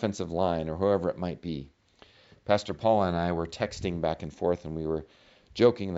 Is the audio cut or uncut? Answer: uncut